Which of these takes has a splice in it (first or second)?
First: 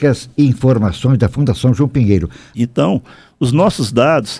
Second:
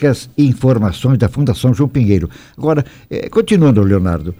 first